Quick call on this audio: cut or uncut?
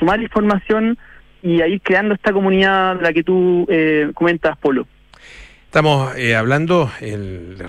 uncut